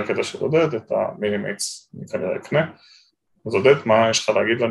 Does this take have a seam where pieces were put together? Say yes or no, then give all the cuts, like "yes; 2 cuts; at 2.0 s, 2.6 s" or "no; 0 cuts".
no; 0 cuts